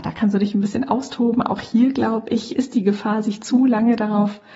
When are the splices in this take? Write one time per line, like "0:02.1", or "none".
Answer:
0:02.5

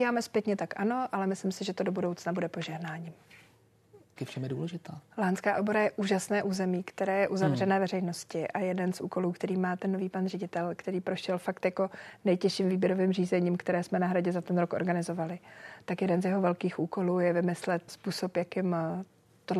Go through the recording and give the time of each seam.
0:04.2
0:17.9

